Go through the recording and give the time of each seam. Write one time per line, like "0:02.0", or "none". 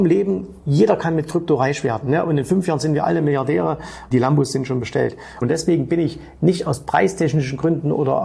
0:05.4